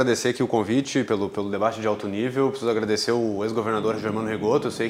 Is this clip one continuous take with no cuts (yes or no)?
yes